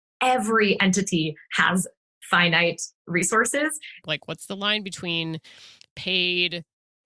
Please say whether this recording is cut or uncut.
cut